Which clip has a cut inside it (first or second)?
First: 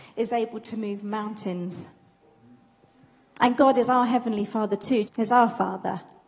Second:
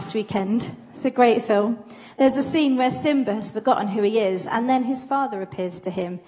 first